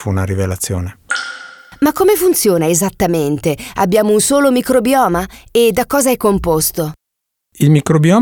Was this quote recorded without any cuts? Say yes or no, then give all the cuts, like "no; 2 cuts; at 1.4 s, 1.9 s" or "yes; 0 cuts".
yes; 0 cuts